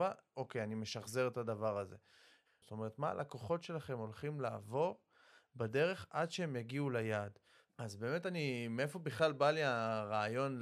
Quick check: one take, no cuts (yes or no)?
no